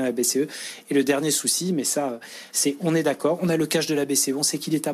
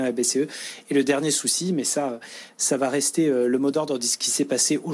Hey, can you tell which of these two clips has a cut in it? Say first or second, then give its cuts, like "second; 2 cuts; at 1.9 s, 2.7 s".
first; 1 cut; at 2.5 s